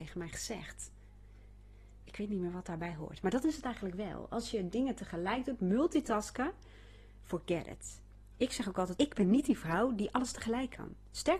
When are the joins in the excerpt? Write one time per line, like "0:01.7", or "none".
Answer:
0:09.0